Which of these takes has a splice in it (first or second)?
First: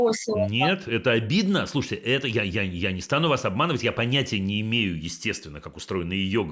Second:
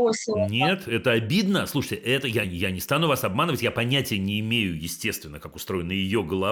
second